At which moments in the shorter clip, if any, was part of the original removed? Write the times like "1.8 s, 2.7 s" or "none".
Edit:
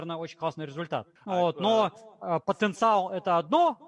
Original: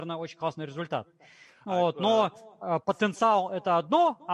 1.2 s